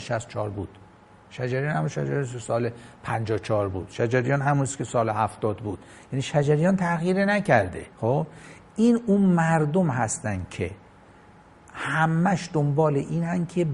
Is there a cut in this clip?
yes; 1 cut; at 7.9 s

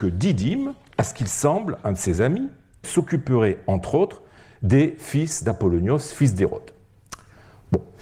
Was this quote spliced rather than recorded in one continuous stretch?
yes; 1 cut; at 2.8 s

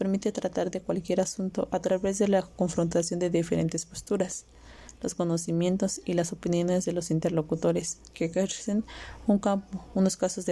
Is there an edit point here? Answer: no; 0 cuts

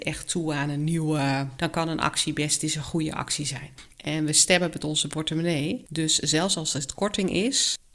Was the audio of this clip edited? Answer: yes; 2 cuts; at 1.6 s, 3.9 s

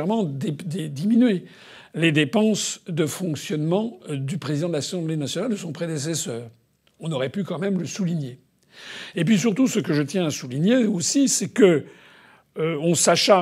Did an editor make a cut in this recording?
no; 0 cuts

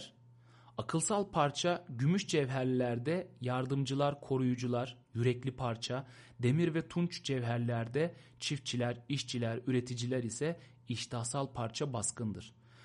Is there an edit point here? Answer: no; 0 cuts

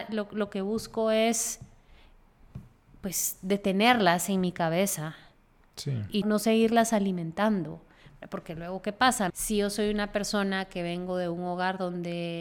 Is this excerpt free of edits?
no; 2 cuts; at 6.2 s, 9.3 s

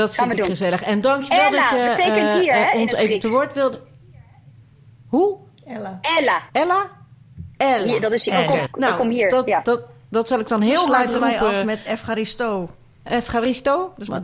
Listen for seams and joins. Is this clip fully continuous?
no; 2 cuts; at 7.5 s, 8.7 s

